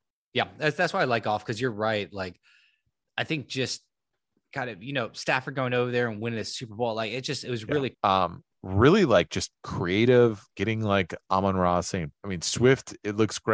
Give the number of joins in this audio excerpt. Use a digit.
2